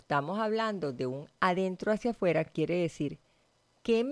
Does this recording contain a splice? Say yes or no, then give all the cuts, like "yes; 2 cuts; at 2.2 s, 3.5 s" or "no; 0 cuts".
no; 0 cuts